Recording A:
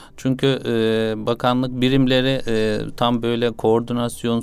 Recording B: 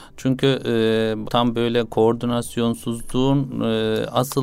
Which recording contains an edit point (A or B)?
B